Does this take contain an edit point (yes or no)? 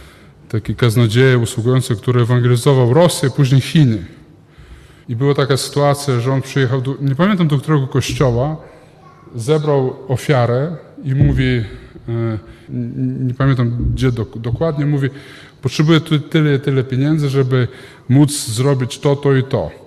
yes